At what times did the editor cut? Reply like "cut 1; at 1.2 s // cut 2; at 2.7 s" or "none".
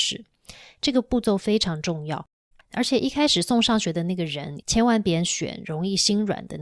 cut 1; at 2.5 s // cut 2; at 4.6 s